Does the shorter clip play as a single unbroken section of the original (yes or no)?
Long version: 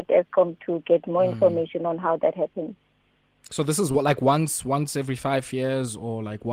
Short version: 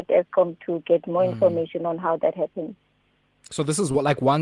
yes